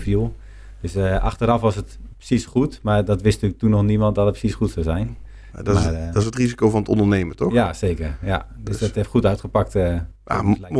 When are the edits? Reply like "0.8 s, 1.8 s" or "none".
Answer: none